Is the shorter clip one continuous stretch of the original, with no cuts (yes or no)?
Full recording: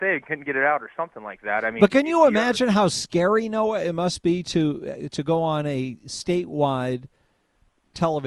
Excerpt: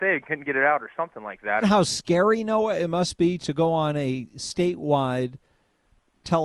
no